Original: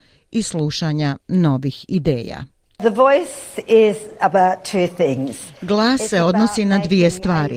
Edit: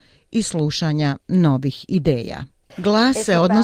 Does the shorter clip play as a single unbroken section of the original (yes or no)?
no